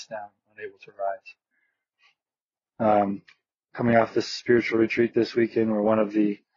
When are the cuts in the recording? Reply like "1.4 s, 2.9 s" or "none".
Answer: 2.7 s